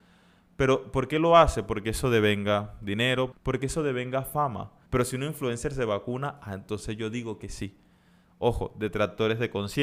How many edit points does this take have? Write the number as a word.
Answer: two